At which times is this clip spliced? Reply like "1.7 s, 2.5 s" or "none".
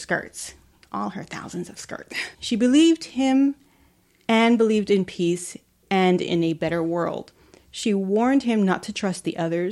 2.3 s

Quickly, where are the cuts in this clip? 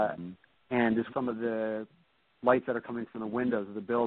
1.1 s

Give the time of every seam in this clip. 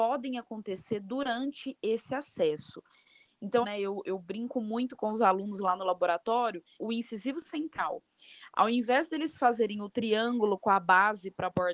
3.6 s, 6.8 s

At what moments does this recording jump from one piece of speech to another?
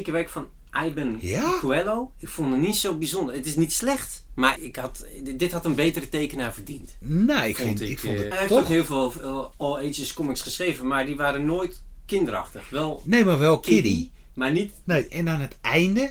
4.6 s, 8.3 s, 15.1 s

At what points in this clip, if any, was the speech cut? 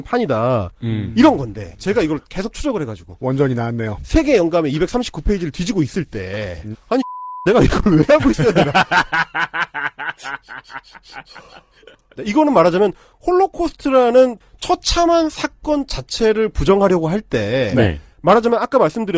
6.7 s, 12.2 s, 18.1 s

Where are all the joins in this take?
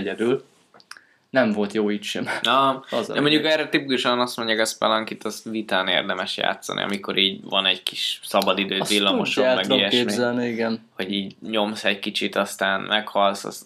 none

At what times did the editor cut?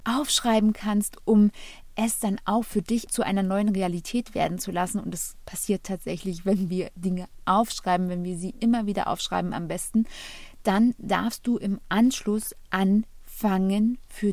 none

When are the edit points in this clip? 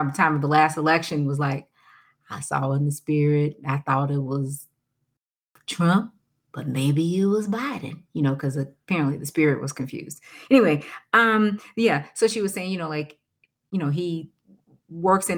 none

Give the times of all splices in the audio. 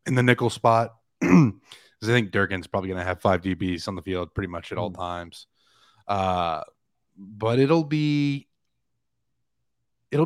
none

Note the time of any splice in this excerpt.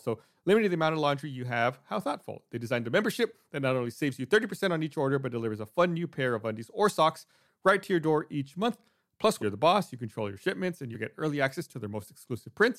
9.4 s, 10.9 s

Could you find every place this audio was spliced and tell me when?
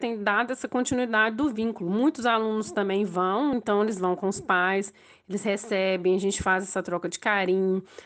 none

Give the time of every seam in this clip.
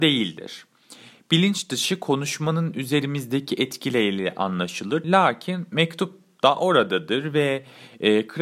5.0 s

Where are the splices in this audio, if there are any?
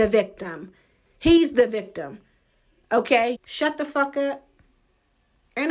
3.3 s

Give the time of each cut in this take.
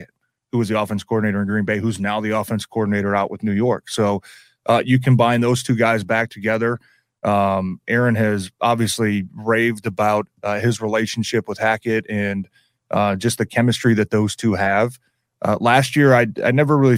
none

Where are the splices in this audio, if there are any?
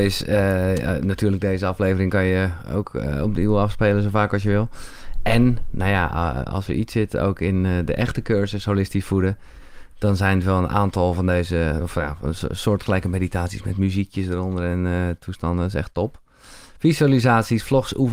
none

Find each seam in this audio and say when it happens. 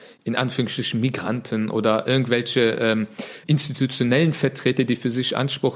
3.4 s

